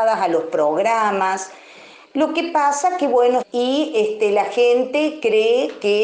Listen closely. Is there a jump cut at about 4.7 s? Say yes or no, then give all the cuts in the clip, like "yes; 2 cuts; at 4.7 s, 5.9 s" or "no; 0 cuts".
no; 2 cuts; at 2.0 s, 3.4 s